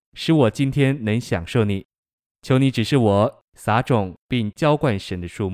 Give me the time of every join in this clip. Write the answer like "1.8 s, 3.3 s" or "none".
3.5 s